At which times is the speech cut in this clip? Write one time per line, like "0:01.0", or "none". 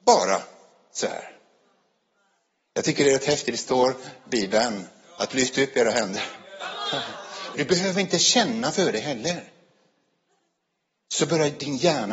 0:07.5